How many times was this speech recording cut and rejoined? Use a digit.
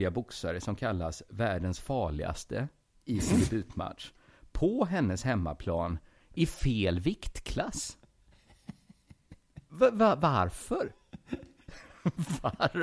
0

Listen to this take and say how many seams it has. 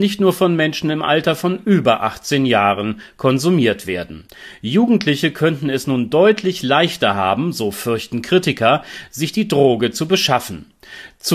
0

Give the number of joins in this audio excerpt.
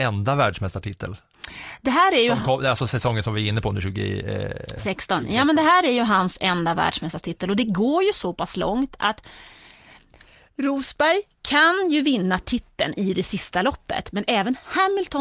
0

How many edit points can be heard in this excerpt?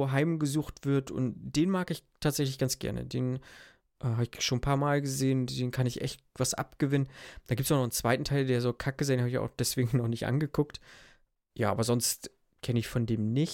0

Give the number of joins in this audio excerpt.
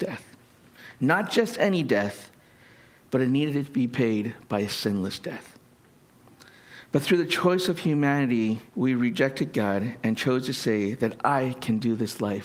2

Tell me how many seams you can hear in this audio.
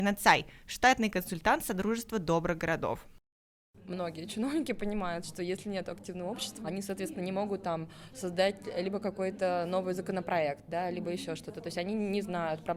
1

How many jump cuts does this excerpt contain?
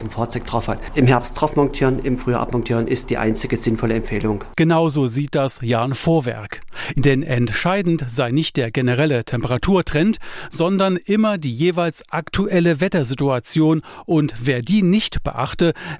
1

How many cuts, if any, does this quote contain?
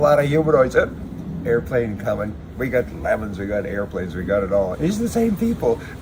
1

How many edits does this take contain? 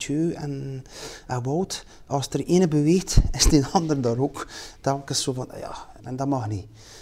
2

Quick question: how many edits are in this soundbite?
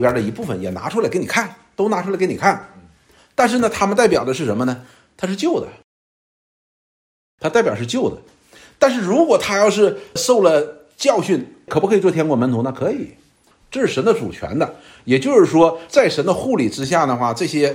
0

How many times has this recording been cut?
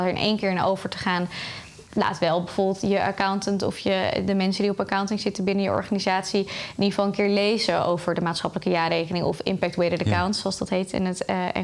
1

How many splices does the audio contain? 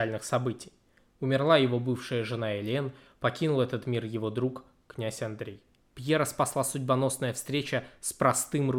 1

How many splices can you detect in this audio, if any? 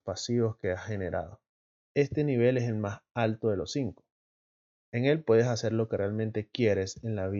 1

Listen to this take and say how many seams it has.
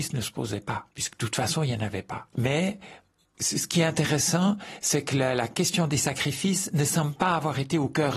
1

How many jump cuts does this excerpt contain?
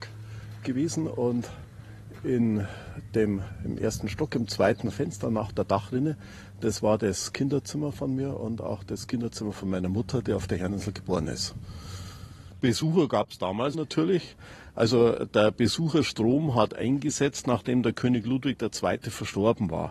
1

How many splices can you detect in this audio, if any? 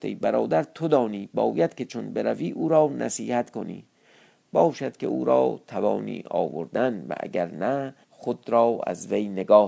1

